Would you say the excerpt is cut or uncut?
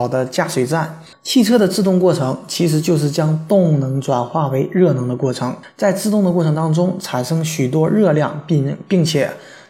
cut